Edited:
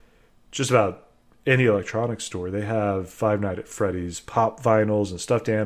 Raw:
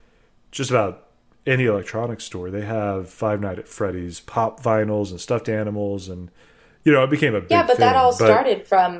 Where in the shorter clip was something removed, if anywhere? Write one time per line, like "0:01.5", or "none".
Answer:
none